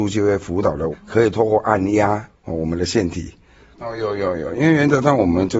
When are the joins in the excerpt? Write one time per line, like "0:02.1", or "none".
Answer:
0:00.9
0:02.3
0:03.7